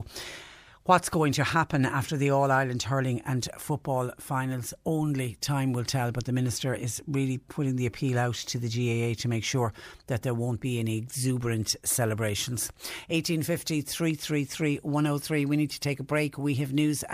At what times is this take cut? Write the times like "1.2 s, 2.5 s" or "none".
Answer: none